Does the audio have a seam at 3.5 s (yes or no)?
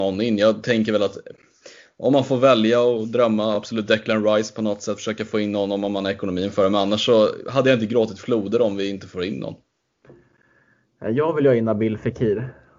no